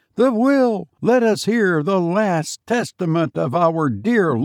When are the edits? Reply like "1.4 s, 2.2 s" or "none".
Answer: 1.0 s